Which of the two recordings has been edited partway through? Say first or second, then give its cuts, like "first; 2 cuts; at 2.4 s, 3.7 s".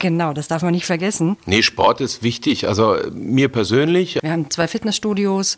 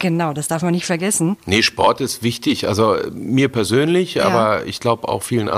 first; 1 cut; at 4.2 s